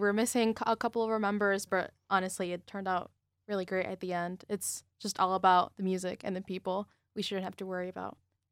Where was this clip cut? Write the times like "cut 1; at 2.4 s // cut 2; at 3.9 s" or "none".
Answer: cut 1; at 1.7 s